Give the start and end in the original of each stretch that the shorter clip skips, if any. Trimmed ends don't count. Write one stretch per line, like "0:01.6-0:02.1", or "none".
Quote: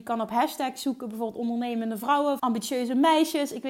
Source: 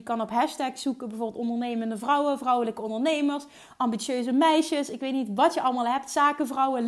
0:02.4-0:03.8

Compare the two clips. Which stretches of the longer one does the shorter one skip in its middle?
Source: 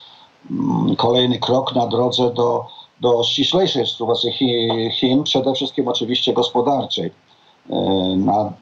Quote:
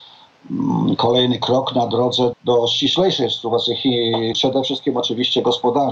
0:02.3-0:02.9
0:04.9-0:05.2

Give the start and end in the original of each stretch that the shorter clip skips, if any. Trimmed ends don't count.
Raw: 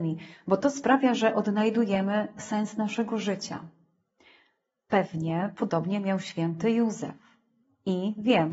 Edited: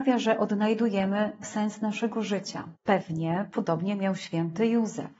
0:03.7-0:04.8

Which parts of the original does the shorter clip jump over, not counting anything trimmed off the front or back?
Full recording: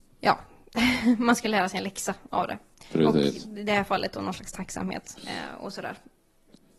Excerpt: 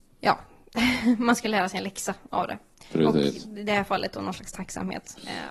none

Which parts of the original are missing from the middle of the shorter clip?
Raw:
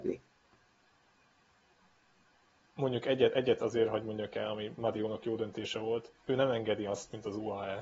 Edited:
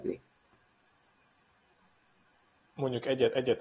none

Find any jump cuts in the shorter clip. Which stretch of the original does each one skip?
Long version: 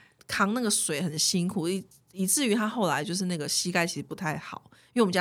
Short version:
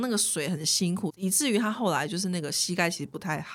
0:01.6-0:02.1

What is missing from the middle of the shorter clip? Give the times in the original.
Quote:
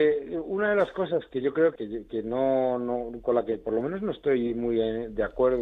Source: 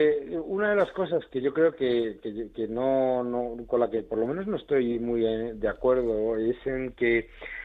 0:01.8-0:02.2

